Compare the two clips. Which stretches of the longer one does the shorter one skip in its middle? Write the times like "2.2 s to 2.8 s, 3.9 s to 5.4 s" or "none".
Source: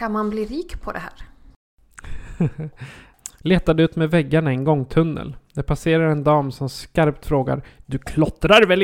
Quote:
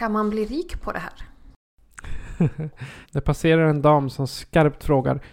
3.0 s to 5.4 s